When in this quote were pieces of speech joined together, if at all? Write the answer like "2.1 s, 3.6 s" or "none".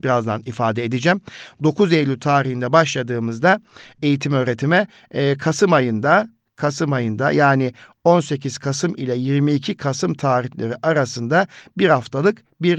none